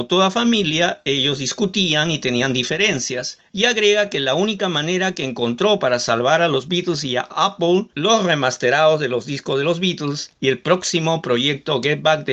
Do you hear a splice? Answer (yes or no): yes